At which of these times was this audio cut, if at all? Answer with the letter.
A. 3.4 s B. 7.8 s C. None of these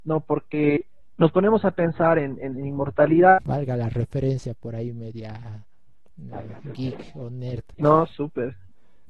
A